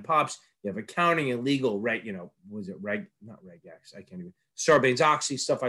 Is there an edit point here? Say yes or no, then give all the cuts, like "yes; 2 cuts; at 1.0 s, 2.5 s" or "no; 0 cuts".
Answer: no; 0 cuts